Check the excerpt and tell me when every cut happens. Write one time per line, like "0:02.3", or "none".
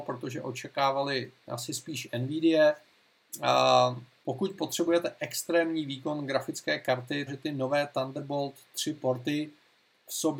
0:04.2
0:07.3